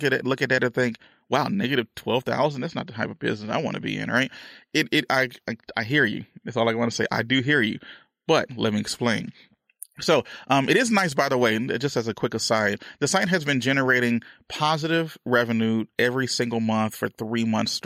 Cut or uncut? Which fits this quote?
uncut